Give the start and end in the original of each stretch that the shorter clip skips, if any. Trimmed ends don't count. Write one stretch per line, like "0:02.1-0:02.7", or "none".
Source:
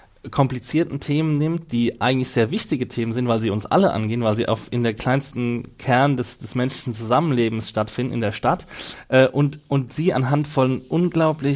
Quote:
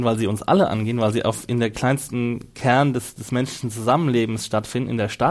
none